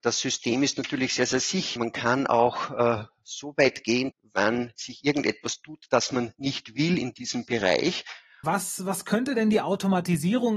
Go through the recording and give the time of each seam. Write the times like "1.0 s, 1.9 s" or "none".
1.8 s, 4.1 s, 8.4 s

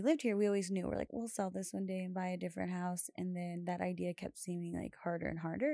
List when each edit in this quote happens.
1.1 s

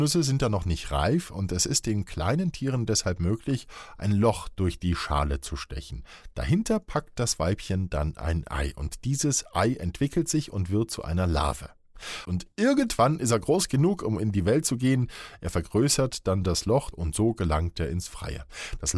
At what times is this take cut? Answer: 12.2 s, 16.9 s

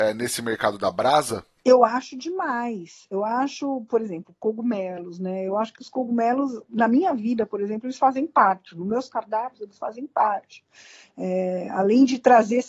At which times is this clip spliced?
none

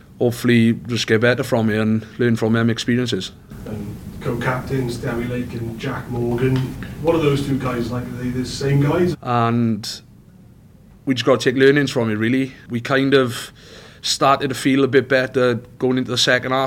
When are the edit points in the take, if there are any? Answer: 9.1 s

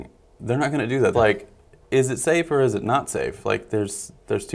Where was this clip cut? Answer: 1.1 s

